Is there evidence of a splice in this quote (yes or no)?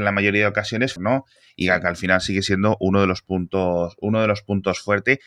yes